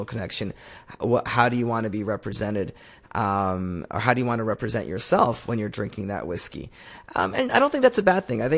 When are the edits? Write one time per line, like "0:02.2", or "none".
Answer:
none